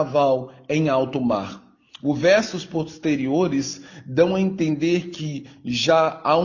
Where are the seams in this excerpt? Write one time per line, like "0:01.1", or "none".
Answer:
0:01.9